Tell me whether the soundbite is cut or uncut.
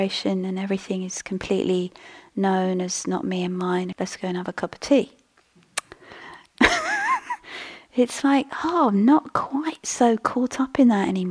cut